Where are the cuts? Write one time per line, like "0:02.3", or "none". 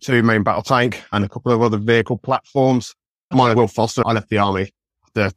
0:03.3

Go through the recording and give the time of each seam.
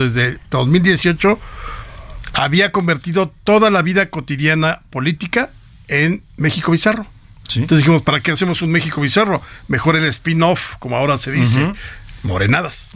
none

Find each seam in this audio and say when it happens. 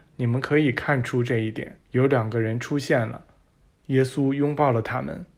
0:01.8

